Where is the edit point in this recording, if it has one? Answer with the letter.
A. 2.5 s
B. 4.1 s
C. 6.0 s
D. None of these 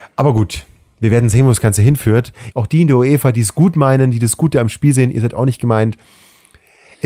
A